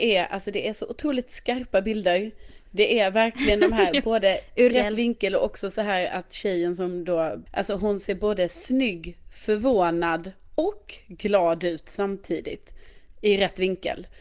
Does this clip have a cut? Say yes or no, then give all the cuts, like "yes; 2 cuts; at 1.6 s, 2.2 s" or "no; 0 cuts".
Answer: yes; 2 cuts; at 4.7 s, 7.5 s